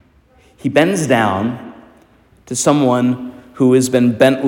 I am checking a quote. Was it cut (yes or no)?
no